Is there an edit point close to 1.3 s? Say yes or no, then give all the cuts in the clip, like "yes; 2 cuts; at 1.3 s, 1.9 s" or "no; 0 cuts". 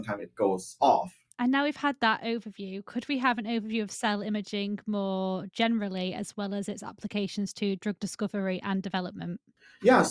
yes; 1 cut; at 1.3 s